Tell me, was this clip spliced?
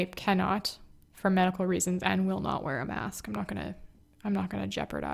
no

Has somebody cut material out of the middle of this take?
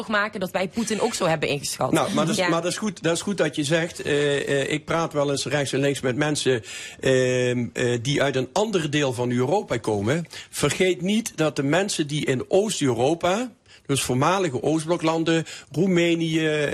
no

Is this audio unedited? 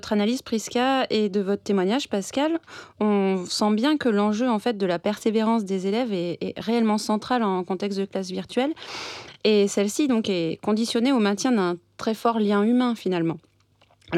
yes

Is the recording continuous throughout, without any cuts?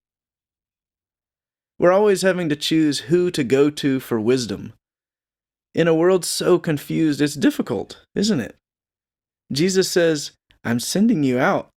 yes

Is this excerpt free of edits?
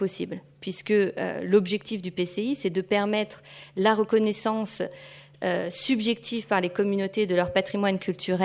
yes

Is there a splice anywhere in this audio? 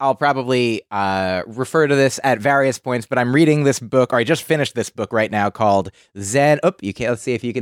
no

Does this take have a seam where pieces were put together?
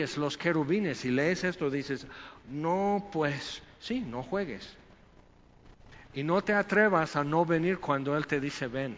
no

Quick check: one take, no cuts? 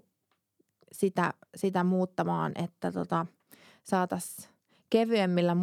yes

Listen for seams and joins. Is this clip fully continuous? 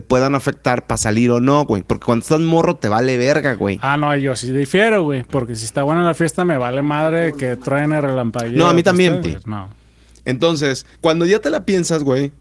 no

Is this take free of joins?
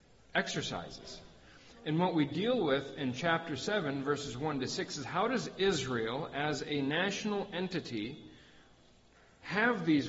yes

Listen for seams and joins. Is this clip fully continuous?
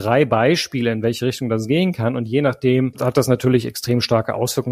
no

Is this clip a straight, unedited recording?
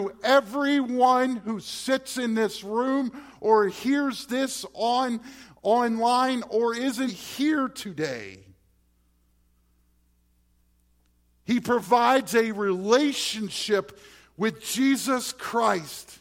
no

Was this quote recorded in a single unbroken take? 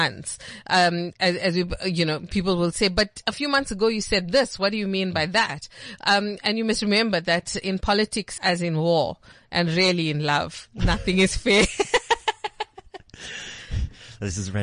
no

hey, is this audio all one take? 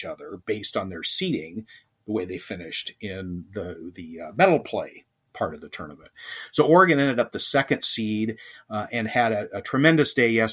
yes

